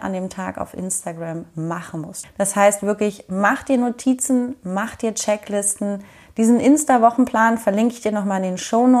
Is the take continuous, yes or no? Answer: no